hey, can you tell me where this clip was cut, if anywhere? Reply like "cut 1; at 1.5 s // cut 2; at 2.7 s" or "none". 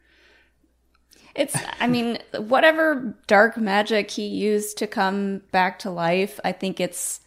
none